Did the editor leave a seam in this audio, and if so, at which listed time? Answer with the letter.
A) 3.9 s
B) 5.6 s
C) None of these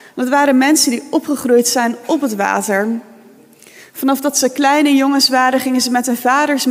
C